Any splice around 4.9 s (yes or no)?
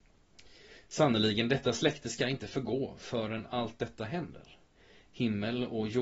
no